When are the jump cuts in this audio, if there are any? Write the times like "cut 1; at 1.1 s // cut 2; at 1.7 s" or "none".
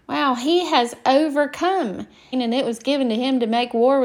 cut 1; at 2.3 s

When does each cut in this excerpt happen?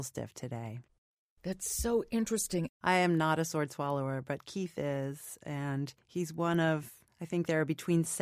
cut 1; at 2.7 s

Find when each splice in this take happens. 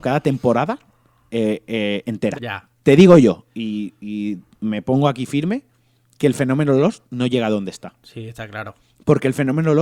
cut 1; at 2.3 s

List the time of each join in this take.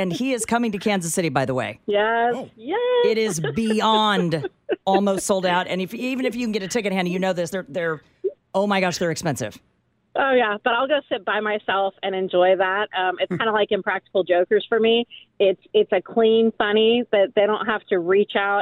none

